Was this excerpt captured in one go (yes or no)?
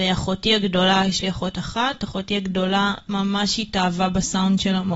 yes